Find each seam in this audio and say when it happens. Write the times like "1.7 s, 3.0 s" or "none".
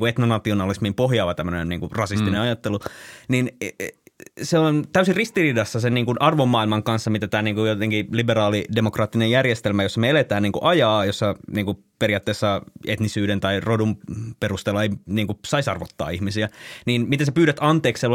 none